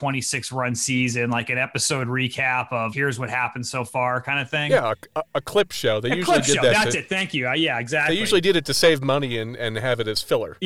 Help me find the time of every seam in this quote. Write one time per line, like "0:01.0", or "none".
0:02.9